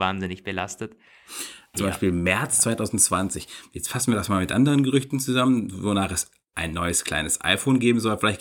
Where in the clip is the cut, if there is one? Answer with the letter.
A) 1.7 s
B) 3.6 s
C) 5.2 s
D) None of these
A